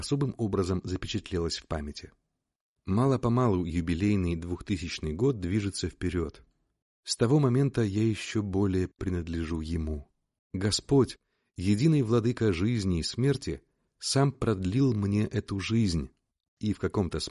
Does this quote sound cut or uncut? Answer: cut